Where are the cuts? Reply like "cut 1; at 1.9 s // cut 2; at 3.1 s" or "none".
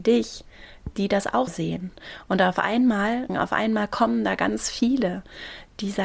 cut 1; at 1.5 s // cut 2; at 3.3 s

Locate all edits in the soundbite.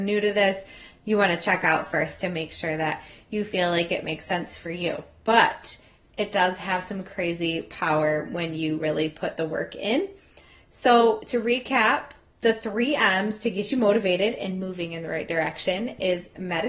none

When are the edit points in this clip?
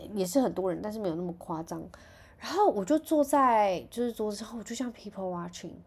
none

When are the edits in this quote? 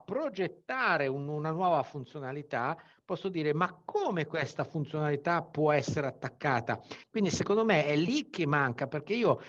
cut 1; at 7.0 s

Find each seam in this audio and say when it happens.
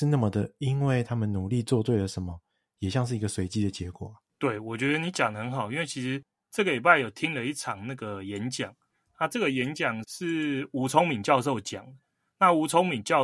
none

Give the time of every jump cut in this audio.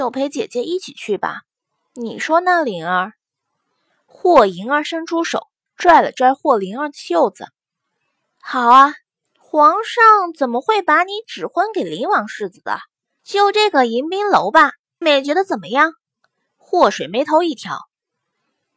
cut 1; at 9.3 s // cut 2; at 13.2 s // cut 3; at 15.0 s

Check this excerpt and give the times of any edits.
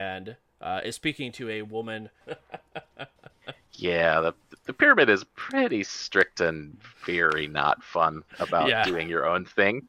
cut 1; at 2.2 s

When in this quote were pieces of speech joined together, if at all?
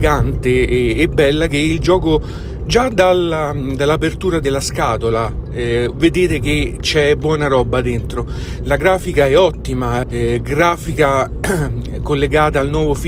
cut 1; at 2.6 s // cut 2; at 10.0 s

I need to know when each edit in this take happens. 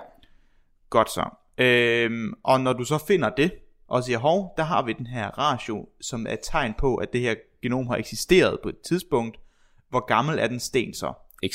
none

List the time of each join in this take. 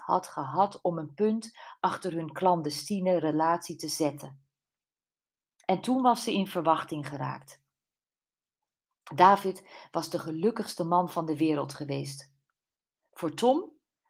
none

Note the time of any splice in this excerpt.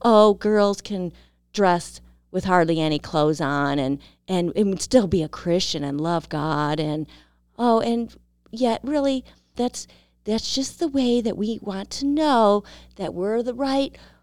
cut 1; at 9.5 s

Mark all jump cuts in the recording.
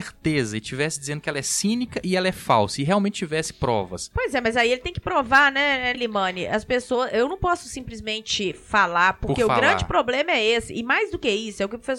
cut 1; at 5.9 s

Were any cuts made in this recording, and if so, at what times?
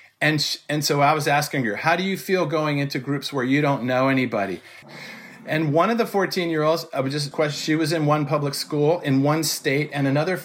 cut 1; at 4.8 s // cut 2; at 7.3 s

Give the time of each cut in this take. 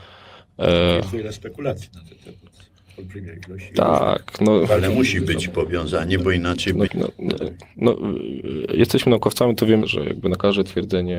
cut 1; at 6.9 s // cut 2; at 9.8 s

